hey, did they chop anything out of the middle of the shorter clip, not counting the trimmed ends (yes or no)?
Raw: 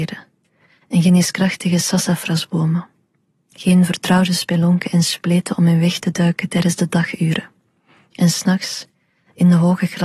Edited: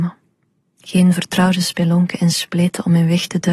no